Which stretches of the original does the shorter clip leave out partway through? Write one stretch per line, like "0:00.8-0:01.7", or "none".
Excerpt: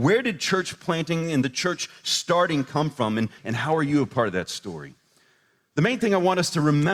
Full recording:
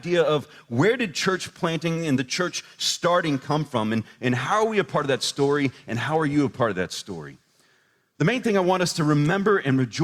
0:04.1-0:05.8